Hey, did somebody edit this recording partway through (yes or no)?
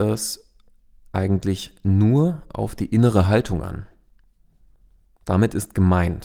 no